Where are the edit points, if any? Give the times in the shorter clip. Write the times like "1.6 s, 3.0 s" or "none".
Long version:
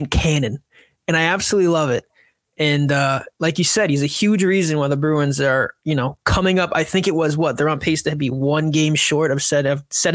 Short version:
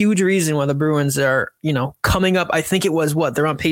none